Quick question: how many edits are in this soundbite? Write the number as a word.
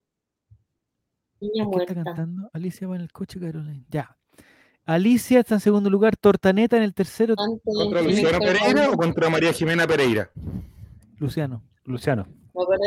one